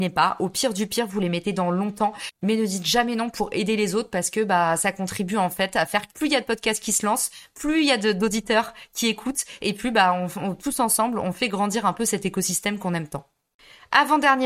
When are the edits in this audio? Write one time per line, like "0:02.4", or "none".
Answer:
0:06.1

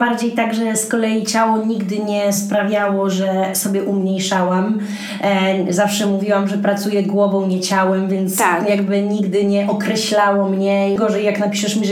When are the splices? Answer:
0:11.0

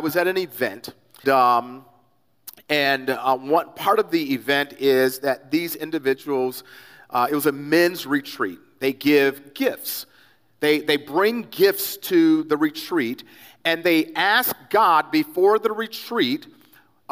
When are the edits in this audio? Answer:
0:01.2

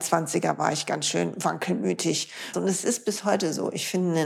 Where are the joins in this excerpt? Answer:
0:02.5

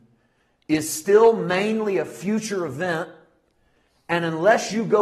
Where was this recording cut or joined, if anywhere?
none

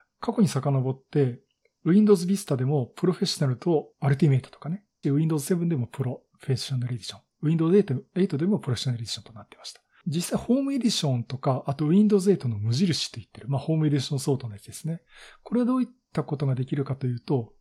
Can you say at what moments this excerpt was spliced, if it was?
0:05.0

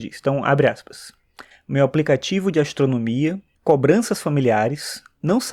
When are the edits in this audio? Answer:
0:01.5
0:03.6

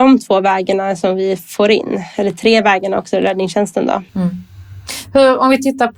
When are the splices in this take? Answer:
0:04.1

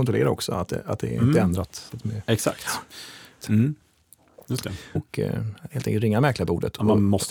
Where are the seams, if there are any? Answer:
0:03.4
0:05.0

